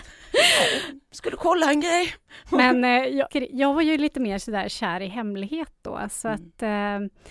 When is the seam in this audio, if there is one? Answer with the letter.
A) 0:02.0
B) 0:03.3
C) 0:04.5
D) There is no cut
B